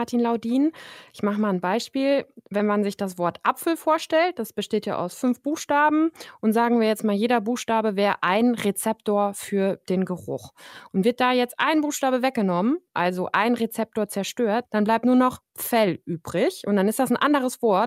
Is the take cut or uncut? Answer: cut